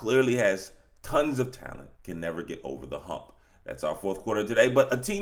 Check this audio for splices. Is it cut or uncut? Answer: cut